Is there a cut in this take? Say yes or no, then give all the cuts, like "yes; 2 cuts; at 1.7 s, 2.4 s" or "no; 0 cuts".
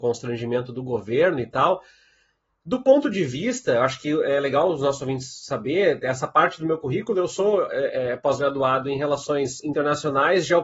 no; 0 cuts